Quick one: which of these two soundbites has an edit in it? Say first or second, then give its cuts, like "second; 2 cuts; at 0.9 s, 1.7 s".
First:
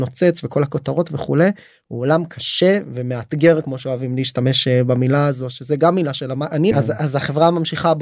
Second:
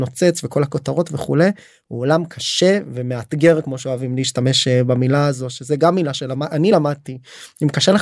first; 1 cut; at 6.7 s